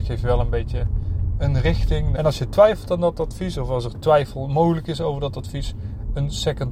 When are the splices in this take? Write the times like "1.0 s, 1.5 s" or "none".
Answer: 2.2 s